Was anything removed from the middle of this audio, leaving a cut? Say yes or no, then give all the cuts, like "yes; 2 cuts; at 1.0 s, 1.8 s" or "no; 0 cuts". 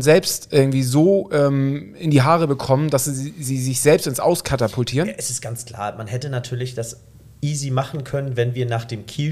no; 0 cuts